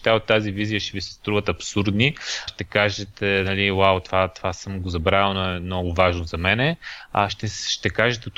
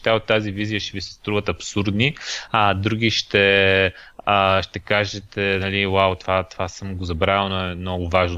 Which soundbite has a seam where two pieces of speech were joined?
first; 1 cut; at 2.5 s

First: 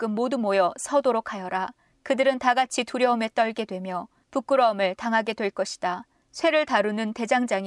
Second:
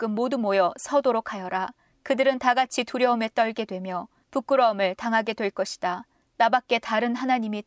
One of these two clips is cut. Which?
second; 1 cut; at 6.3 s

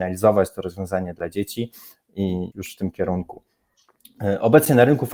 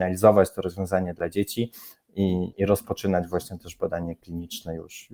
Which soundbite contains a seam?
first; 1 cut; at 2.5 s

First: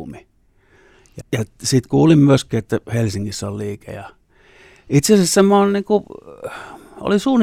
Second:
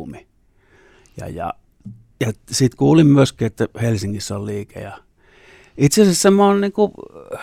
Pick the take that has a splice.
first; 1 cut; at 1.2 s

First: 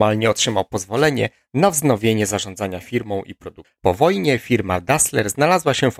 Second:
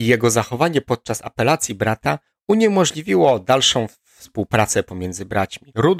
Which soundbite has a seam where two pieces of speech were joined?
first; 1 cut; at 3.8 s

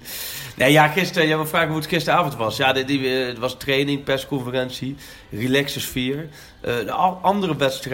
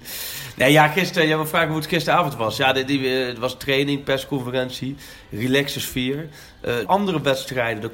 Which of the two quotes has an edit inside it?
second; 1 cut; at 6.8 s

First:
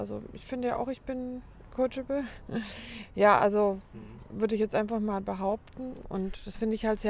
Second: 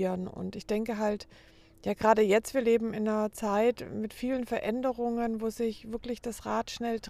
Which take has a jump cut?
first; 1 cut; at 6.0 s

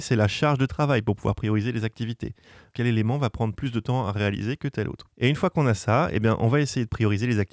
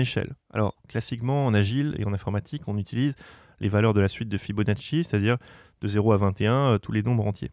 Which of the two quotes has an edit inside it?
first; 2 cuts; at 2.7 s, 5.1 s

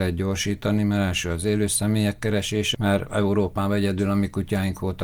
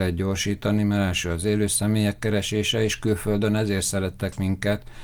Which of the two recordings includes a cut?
first; 1 cut; at 2.7 s

